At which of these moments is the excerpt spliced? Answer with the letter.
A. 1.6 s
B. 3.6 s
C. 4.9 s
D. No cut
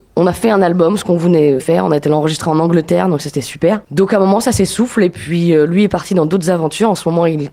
A